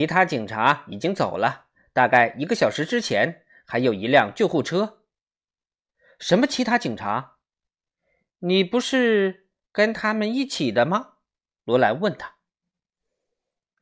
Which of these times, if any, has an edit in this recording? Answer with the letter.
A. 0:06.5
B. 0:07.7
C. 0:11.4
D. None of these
C